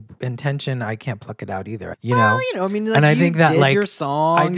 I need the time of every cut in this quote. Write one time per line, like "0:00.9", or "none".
0:01.9